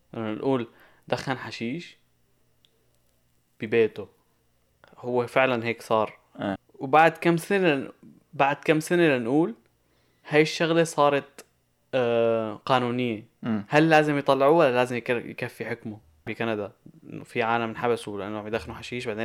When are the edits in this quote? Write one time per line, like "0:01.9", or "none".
0:06.6
0:16.3